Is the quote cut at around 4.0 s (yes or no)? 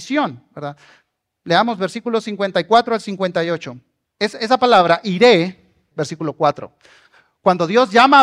yes